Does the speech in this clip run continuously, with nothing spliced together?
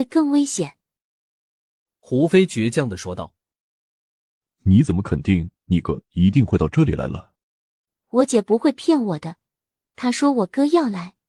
no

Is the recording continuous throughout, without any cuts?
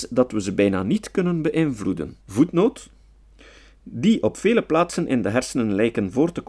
no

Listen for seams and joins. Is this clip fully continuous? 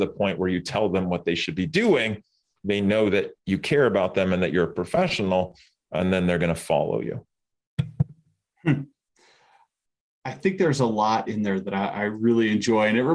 no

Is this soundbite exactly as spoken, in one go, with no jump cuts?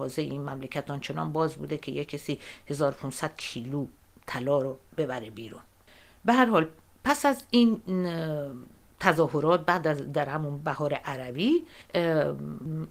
yes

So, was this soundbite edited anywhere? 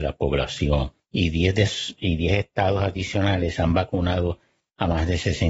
no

